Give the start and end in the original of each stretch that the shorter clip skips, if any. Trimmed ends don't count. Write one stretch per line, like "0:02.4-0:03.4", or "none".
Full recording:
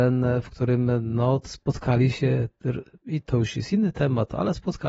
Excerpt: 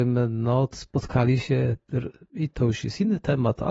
none